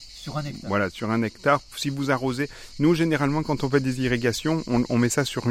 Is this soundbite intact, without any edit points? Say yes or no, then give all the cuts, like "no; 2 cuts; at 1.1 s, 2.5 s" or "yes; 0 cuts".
yes; 0 cuts